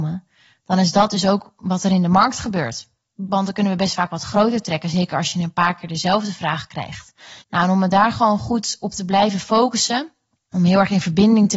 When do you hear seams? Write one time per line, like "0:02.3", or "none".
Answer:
0:07.4